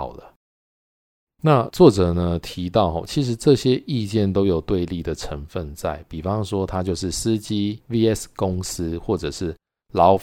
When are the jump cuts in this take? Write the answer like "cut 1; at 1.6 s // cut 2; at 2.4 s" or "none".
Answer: cut 1; at 1.3 s